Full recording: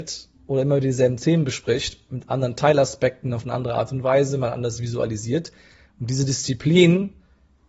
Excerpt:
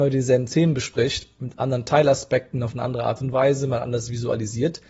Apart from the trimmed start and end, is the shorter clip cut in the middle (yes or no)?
no